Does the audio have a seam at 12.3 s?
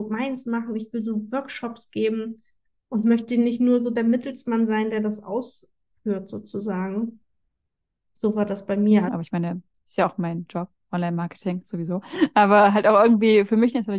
no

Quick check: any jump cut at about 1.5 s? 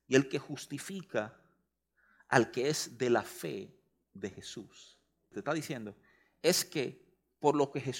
no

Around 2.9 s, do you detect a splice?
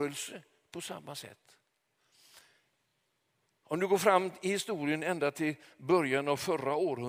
no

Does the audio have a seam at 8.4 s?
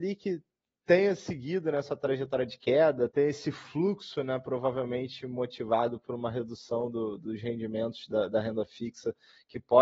no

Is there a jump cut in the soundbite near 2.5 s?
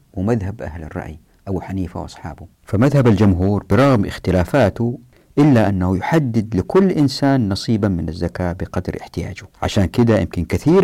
yes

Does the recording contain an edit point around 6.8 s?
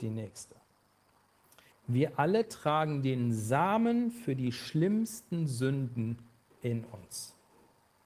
no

